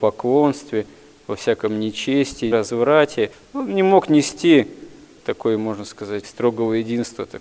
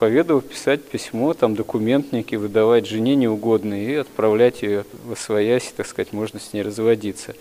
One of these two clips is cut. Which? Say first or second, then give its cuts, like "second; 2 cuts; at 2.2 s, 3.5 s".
first; 2 cuts; at 2.5 s, 6.2 s